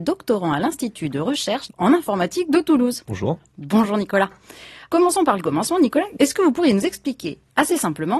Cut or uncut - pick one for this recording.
uncut